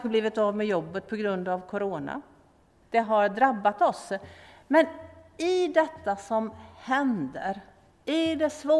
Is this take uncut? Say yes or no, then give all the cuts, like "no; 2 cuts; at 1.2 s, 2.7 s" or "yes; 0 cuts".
no; 1 cut; at 2.8 s